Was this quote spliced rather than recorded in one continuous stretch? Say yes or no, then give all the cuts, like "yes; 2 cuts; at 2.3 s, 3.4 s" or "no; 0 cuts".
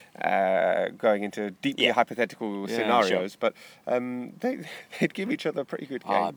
no; 0 cuts